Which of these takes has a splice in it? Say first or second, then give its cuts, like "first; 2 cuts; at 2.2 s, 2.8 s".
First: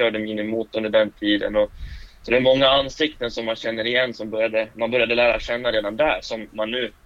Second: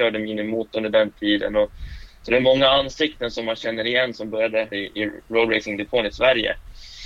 second; 1 cut; at 4.7 s